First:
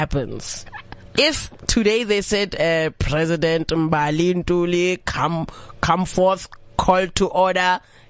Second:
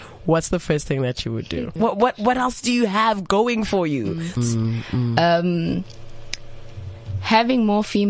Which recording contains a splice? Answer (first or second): second